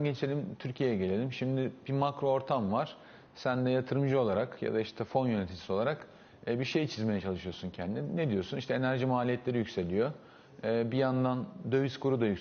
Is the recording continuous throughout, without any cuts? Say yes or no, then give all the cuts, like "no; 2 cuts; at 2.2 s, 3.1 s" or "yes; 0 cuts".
yes; 0 cuts